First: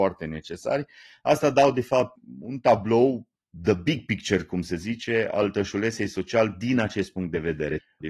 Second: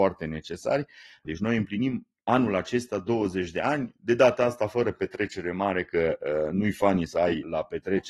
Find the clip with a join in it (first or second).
second